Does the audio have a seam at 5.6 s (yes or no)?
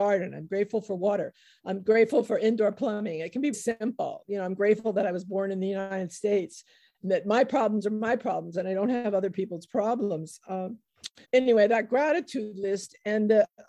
no